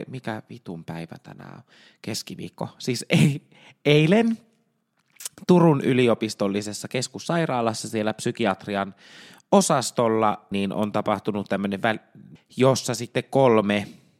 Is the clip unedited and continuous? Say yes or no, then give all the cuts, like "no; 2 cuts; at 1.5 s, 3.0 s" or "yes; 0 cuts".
no; 2 cuts; at 10.5 s, 12.4 s